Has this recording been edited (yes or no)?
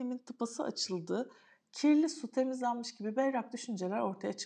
no